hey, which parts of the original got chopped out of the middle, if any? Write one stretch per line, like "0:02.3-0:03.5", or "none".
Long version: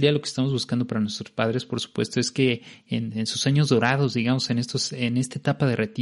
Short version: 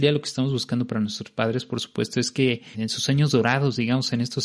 0:02.7-0:03.1